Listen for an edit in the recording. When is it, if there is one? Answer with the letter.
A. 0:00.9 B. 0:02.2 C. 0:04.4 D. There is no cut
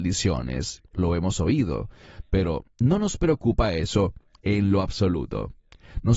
A